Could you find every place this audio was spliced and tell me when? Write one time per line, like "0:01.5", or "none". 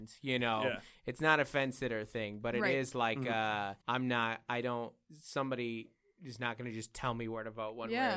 0:03.8